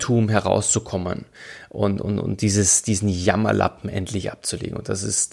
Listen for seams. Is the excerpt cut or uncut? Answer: uncut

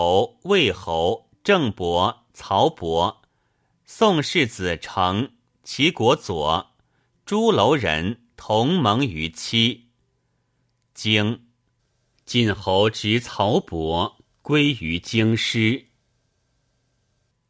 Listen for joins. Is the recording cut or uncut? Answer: uncut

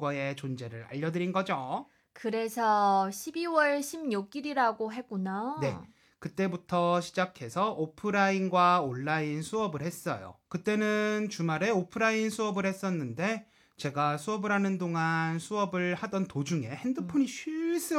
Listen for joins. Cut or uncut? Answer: cut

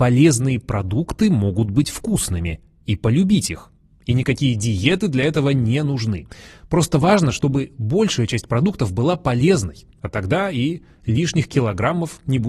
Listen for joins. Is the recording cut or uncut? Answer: uncut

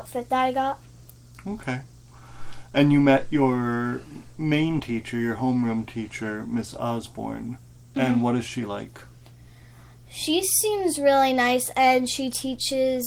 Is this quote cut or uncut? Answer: uncut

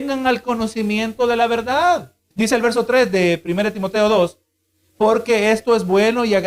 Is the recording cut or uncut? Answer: cut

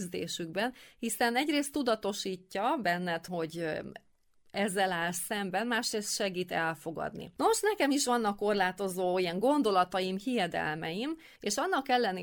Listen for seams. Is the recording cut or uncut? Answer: cut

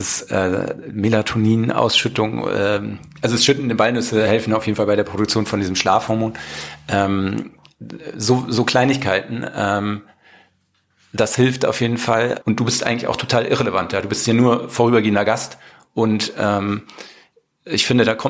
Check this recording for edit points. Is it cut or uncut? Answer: cut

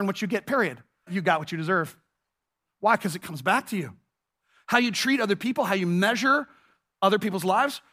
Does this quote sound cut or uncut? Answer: cut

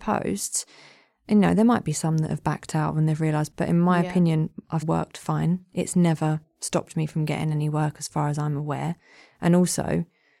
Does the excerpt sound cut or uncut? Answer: cut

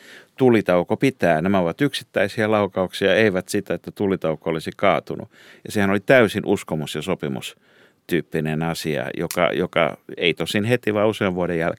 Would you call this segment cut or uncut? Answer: uncut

